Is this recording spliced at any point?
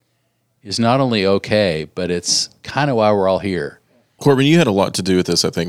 yes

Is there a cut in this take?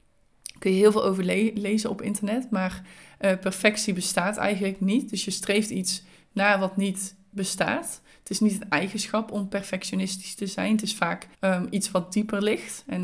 yes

